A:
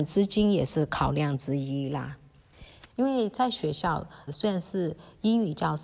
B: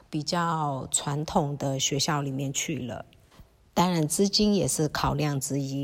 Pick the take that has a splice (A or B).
A